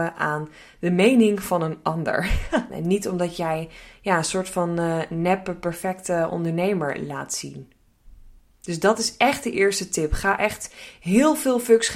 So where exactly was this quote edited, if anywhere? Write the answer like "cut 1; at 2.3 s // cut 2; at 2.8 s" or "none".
cut 1; at 2.7 s